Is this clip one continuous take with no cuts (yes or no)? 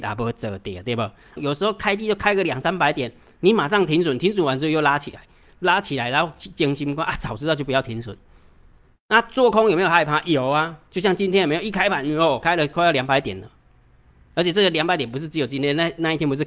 no